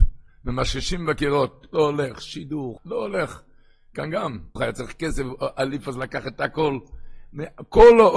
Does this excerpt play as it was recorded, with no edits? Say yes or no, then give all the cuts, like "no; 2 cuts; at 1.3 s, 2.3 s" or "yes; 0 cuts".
no; 2 cuts; at 2.8 s, 4.6 s